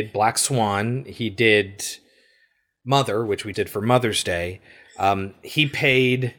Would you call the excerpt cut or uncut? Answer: cut